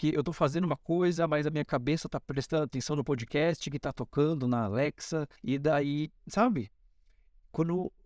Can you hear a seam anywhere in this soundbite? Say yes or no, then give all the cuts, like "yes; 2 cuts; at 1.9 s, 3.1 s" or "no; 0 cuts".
yes; 1 cut; at 5.4 s